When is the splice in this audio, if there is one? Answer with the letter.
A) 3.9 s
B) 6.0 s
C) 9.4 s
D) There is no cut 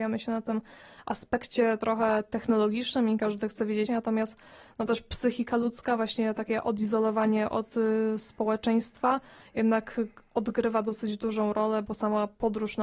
A